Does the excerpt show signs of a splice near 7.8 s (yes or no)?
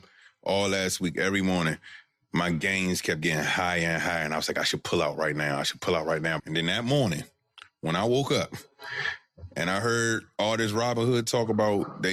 no